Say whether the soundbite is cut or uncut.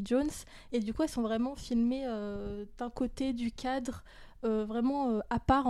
uncut